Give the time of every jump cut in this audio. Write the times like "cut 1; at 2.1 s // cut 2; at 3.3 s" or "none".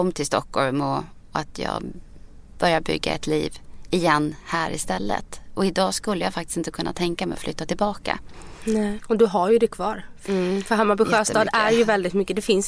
cut 1; at 9.0 s // cut 2; at 10.3 s